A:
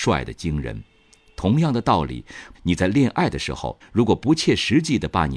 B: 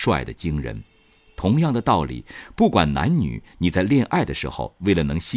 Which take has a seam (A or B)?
A